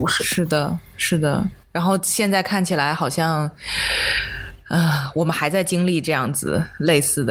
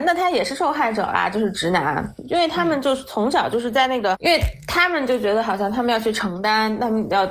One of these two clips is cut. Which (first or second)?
second